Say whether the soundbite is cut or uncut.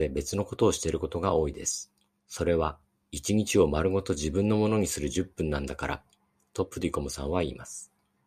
cut